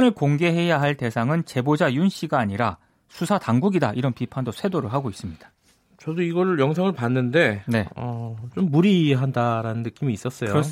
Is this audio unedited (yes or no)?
yes